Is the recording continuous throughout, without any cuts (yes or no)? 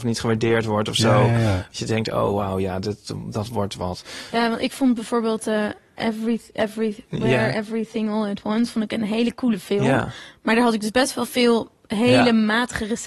yes